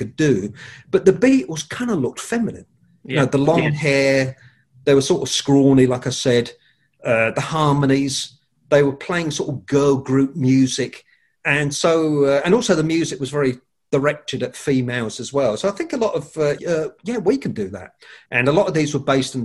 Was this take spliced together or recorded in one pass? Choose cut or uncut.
cut